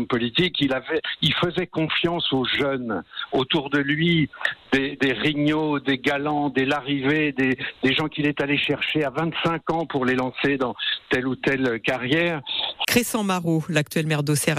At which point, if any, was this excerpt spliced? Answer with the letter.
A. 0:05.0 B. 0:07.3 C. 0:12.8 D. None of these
C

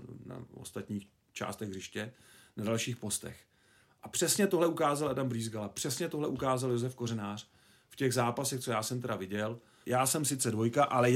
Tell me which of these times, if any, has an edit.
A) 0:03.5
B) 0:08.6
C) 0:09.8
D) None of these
C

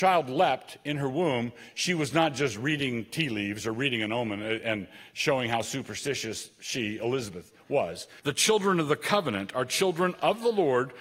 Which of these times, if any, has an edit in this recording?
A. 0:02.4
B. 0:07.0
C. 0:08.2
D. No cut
C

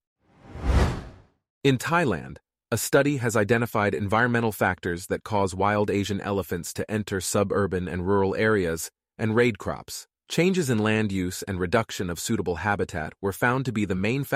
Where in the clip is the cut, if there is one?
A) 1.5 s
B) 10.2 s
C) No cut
B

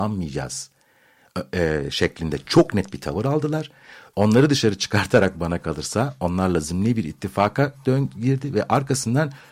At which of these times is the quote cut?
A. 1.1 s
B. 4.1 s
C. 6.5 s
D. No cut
B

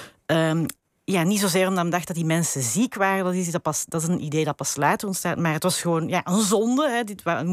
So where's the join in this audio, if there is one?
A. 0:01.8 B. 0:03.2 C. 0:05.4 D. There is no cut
D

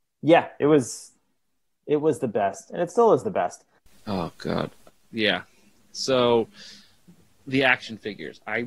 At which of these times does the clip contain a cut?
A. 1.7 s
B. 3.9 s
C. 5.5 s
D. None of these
B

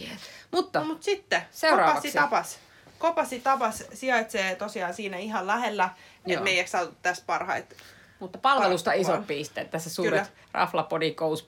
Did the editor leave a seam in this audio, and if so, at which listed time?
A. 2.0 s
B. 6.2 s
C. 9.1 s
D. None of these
B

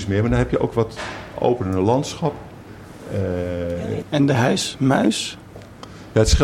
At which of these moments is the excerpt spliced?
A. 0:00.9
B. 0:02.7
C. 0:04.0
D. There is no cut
C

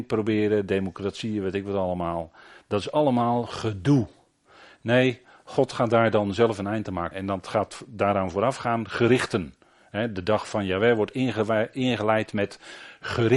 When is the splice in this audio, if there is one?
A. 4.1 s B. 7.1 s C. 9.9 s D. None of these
B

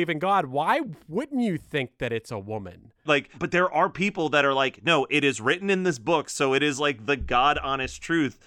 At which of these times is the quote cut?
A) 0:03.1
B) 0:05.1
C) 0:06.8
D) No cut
A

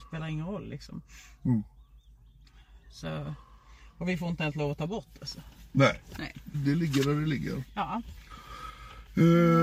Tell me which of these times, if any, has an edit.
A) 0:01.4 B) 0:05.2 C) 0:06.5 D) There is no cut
C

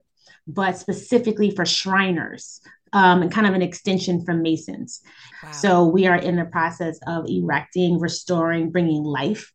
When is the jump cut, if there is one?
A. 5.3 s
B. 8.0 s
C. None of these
A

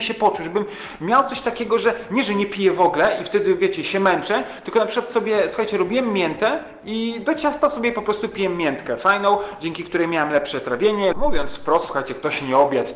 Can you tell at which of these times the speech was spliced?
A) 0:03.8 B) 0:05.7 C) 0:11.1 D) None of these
C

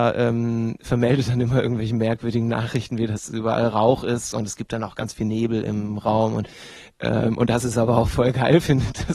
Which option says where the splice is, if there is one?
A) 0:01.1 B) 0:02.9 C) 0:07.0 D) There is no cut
D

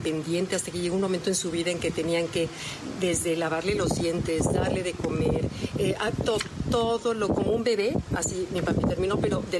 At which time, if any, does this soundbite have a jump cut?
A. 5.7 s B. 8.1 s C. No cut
C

